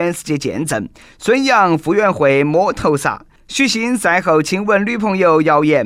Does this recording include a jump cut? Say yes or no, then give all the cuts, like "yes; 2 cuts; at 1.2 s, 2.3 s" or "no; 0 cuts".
no; 0 cuts